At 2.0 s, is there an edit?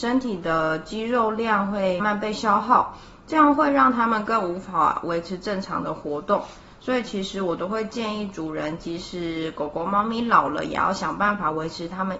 yes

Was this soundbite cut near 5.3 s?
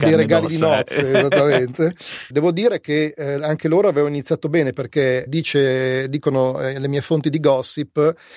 yes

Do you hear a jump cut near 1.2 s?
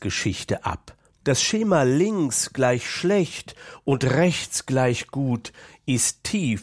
yes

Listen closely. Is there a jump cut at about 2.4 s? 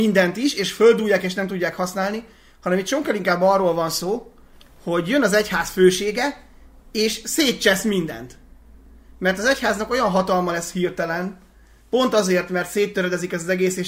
no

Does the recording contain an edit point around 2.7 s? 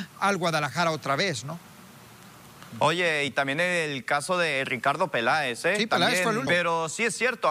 no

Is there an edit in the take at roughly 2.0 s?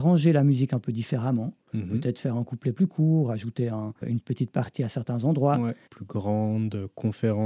no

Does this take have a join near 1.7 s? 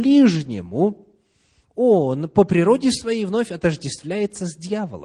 no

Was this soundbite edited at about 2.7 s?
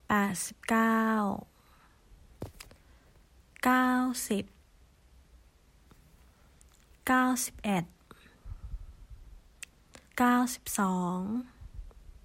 no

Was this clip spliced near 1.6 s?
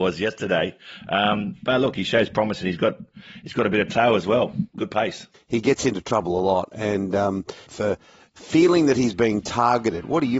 no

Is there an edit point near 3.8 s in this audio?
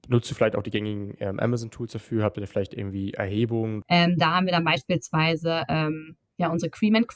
yes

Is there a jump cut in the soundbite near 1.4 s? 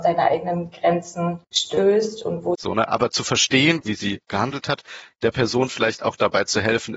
yes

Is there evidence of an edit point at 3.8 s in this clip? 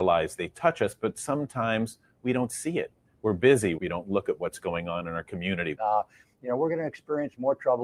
yes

